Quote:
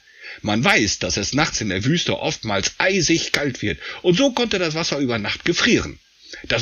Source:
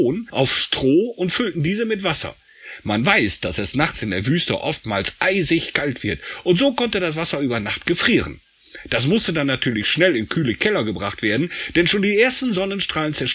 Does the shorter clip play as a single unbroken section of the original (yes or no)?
yes